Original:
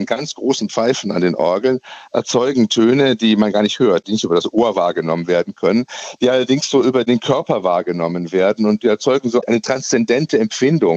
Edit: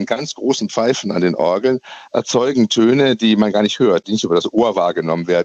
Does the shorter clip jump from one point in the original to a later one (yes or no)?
no